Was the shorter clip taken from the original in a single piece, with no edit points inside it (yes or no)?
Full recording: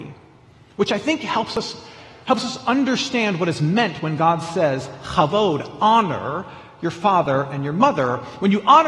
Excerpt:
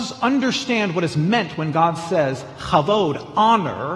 yes